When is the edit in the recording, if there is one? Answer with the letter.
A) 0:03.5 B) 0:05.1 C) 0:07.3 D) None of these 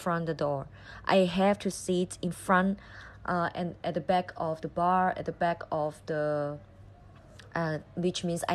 D